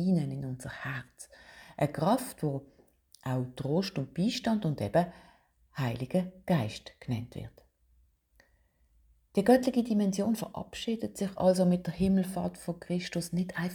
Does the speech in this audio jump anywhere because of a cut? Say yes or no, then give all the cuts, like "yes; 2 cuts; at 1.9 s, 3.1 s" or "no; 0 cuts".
no; 0 cuts